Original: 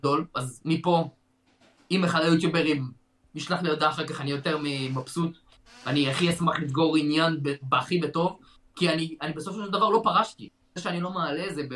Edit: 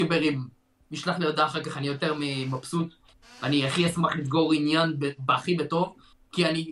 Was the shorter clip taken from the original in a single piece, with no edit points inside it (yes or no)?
yes